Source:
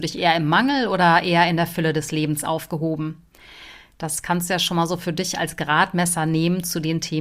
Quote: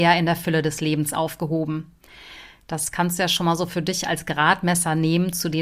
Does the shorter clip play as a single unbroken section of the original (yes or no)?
yes